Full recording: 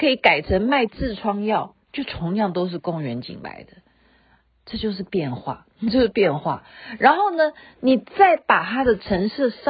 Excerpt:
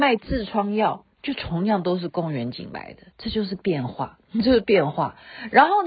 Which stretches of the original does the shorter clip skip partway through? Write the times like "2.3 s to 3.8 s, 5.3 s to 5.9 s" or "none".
3.8 s to 4.6 s